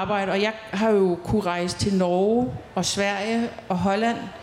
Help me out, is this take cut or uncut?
uncut